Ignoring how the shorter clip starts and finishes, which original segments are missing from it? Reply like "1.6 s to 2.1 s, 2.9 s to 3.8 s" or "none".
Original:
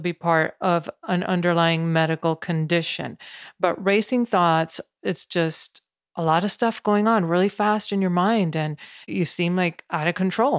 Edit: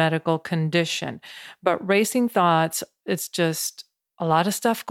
none